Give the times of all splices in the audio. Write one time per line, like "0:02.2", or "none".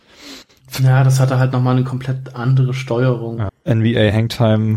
0:03.5